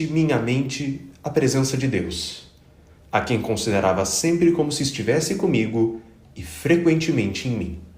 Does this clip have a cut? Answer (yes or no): no